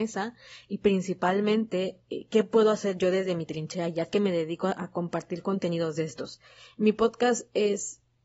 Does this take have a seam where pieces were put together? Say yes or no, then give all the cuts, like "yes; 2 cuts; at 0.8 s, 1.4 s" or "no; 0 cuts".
no; 0 cuts